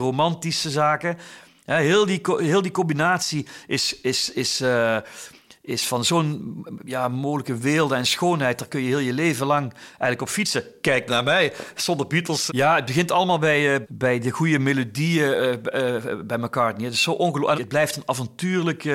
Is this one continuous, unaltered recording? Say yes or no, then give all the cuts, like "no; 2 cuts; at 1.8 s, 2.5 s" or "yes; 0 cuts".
no; 3 cuts; at 12.5 s, 13.8 s, 17.5 s